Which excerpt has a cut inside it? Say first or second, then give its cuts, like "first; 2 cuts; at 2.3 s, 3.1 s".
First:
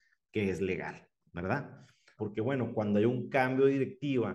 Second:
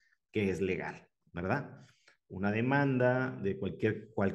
first; 1 cut; at 2.2 s